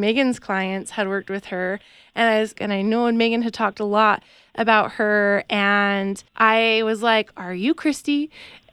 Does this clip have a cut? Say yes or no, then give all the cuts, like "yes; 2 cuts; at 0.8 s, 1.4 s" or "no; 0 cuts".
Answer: yes; 2 cuts; at 2.6 s, 6.3 s